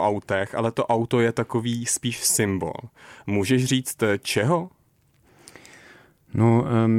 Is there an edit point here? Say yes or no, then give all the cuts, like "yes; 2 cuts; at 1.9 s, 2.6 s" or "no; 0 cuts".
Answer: no; 0 cuts